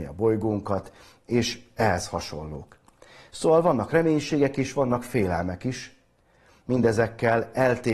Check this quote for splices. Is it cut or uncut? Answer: uncut